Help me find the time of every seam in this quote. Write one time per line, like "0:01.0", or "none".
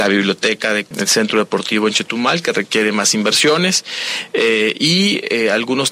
0:00.9

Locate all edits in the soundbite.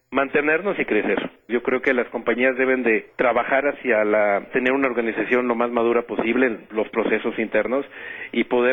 0:01.5

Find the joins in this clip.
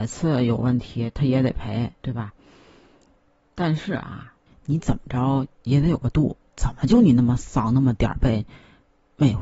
0:02.0
0:04.5

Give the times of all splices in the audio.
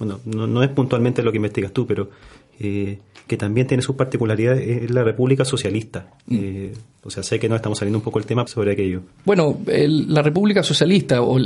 0:08.5

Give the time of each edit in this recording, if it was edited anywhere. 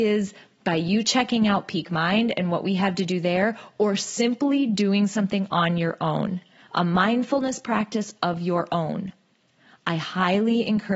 none

